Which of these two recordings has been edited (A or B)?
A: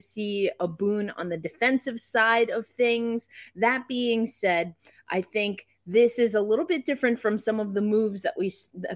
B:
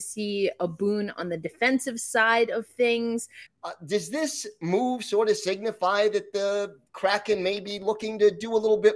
B